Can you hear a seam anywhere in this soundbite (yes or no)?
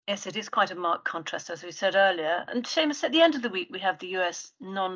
no